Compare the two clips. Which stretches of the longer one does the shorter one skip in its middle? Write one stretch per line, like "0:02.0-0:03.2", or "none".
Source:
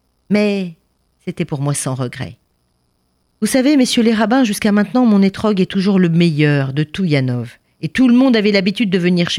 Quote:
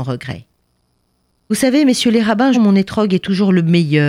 0:04.5-0:05.0